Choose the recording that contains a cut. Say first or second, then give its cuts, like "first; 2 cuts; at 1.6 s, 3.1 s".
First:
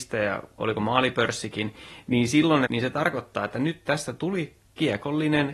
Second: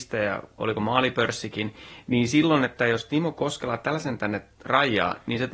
first; 1 cut; at 2.7 s